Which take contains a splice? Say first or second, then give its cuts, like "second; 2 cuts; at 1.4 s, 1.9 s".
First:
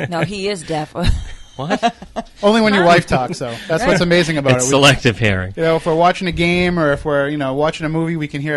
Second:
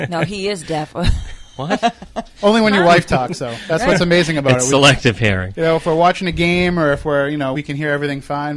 second; 1 cut; at 7.5 s